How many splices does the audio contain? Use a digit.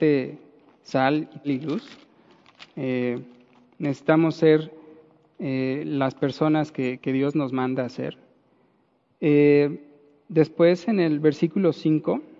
2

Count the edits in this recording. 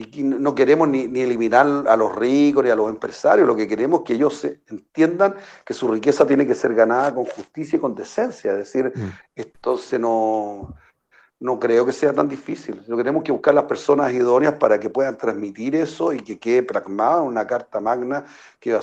1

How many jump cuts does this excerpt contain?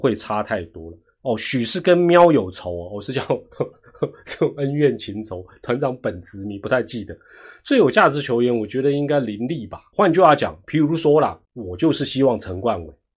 2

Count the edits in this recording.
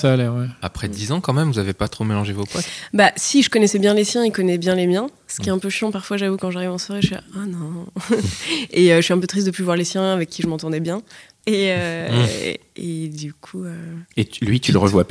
1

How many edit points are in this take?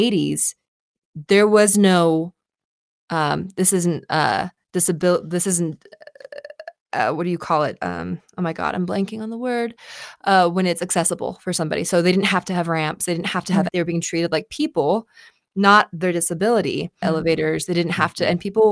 2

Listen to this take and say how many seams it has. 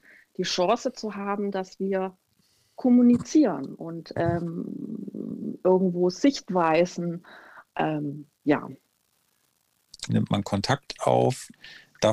2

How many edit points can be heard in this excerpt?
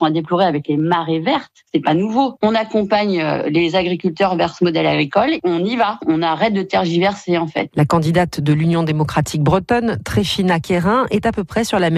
0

